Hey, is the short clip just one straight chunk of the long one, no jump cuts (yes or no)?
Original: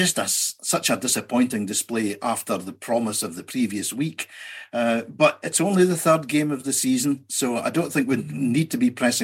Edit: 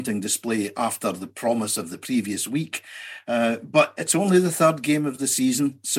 yes